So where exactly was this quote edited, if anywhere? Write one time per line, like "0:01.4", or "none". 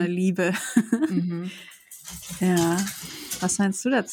none